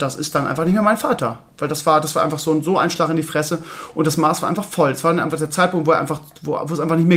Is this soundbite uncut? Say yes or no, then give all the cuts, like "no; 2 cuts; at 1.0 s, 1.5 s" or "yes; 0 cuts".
yes; 0 cuts